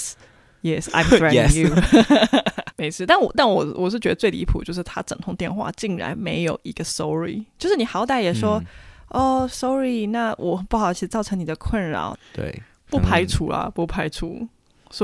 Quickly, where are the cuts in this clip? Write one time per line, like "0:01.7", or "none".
0:02.7
0:12.1